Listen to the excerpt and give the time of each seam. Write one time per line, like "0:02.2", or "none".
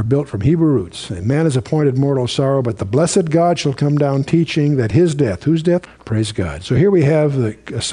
0:05.9